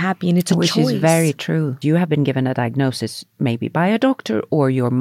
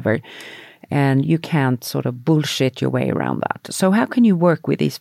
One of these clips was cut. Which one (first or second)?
first